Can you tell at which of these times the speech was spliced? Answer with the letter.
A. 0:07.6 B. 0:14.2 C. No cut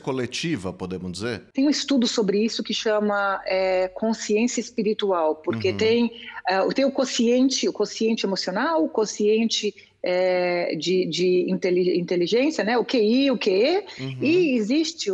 C